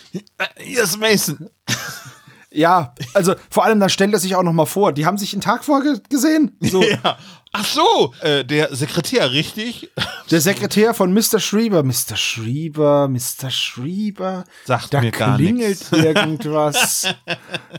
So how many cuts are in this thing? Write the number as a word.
one